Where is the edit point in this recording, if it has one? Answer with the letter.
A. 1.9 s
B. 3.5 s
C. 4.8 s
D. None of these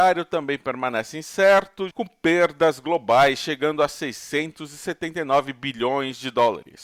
A